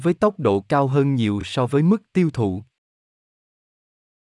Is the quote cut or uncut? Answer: uncut